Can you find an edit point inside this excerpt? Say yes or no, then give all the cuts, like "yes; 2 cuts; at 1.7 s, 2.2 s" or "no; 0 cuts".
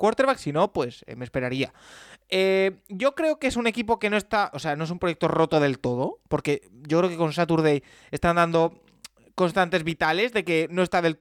no; 0 cuts